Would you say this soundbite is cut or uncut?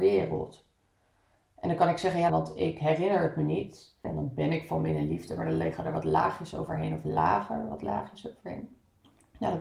cut